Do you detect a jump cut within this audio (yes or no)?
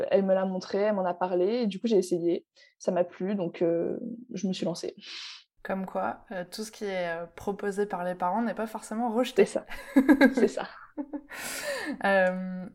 no